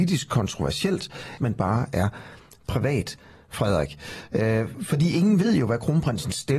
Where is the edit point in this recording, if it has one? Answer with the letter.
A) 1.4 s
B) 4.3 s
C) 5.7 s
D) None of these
A